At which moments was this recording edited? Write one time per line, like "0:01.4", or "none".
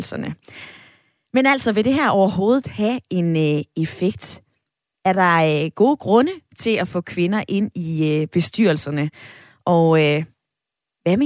none